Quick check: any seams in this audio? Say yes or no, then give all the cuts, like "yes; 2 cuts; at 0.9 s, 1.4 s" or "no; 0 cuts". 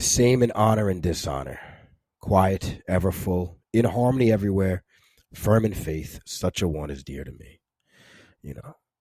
no; 0 cuts